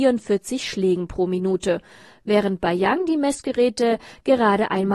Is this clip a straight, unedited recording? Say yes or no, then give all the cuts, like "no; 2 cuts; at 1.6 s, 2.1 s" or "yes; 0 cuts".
yes; 0 cuts